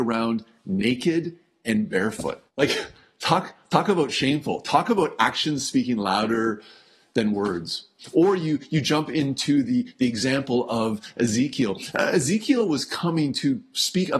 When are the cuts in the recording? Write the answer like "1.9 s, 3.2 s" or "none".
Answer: 2.5 s